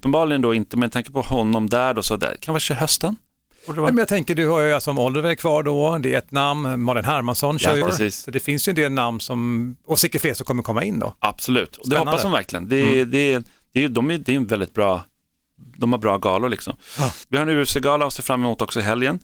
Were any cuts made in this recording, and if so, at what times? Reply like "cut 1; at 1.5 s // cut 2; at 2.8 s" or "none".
cut 1; at 7.8 s